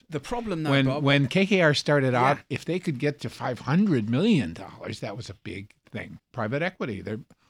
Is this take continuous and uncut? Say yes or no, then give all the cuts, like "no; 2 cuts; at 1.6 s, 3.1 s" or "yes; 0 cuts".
no; 1 cut; at 6.2 s